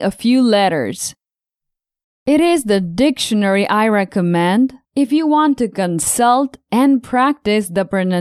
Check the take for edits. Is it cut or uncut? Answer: cut